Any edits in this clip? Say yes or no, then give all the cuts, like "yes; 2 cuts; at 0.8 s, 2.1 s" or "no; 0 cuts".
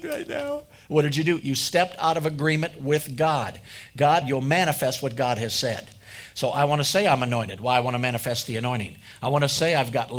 yes; 1 cut; at 4.2 s